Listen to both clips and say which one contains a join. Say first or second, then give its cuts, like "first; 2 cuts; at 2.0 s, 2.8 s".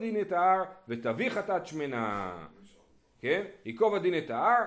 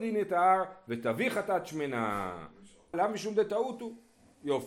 second; 1 cut; at 2.9 s